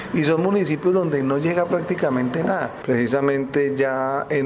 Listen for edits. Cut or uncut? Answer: cut